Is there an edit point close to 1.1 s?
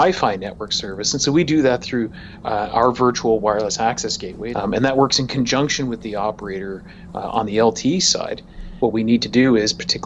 no; 2 cuts; at 4.5 s, 8.8 s

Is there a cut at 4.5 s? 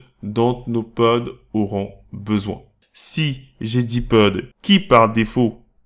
yes; 2 cuts; at 2.8 s, 4.5 s

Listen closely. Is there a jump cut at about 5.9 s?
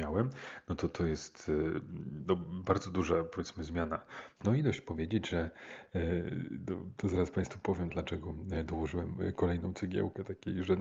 no; 2 cuts; at 4.4 s, 7.9 s

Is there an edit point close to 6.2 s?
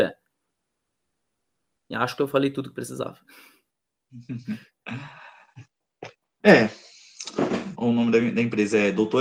no; 1 cut; at 7.7 s

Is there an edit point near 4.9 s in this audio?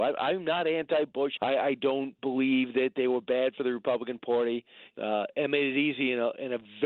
yes; 2 cuts; at 1.4 s, 4.9 s

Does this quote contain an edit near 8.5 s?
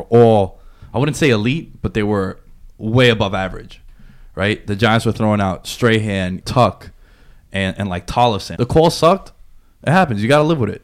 yes; 2 cuts; at 6.4 s, 8.5 s

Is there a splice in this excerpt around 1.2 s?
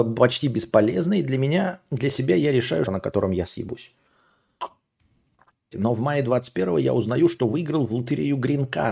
no; 2 cuts; at 2.9 s, 5.7 s

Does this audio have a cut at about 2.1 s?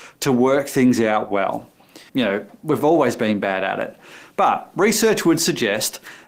yes; 1 cut; at 2.1 s

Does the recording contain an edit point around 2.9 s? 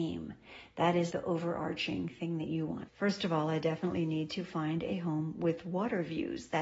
yes; 2 cuts; at 1.1 s, 2.9 s

